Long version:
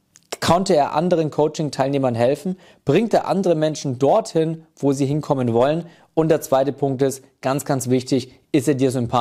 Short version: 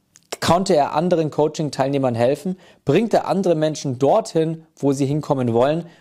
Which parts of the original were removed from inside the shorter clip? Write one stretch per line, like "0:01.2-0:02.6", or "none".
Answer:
none

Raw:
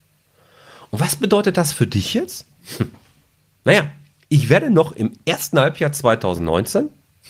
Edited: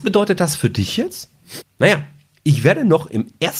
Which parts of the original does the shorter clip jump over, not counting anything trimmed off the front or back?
0:02.8-0:03.5

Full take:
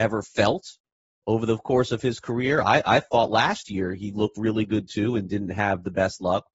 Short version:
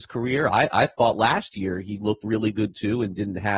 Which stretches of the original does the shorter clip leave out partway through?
none

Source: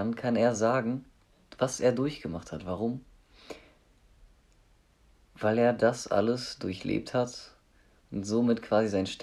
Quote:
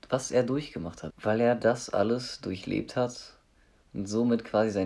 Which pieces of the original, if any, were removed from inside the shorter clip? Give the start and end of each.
0:02.6-0:05.3

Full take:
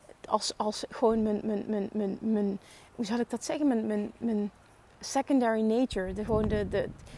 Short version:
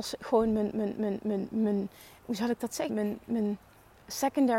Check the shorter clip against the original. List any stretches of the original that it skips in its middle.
0:03.6-0:03.8

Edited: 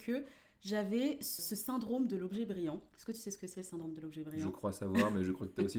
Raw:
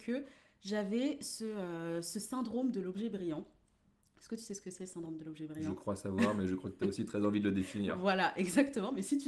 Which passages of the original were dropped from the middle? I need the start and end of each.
0:01.4-0:02.0
0:03.5-0:04.1

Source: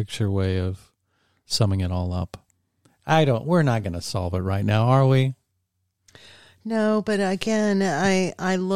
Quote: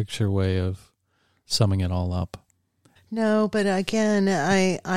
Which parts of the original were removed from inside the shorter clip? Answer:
0:03.0-0:06.5

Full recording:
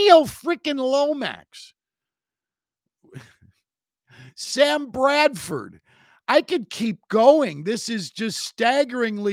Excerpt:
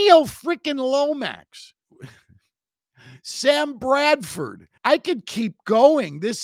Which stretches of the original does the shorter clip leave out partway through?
0:01.8-0:02.9
0:05.9-0:06.2

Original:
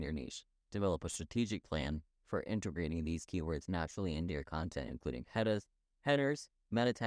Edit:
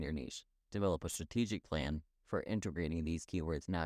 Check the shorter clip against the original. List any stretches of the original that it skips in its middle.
none

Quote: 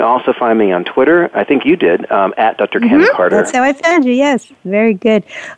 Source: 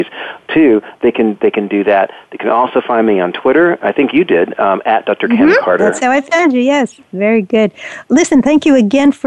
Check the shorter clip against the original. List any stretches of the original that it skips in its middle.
none

